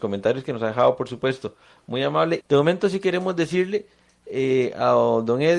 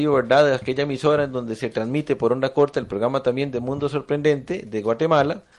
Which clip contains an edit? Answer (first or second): first